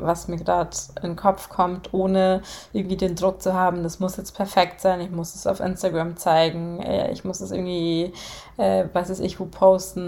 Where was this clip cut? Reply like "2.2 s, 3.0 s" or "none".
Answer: none